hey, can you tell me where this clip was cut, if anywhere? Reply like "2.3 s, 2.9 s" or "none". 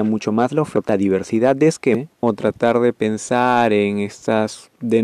2.2 s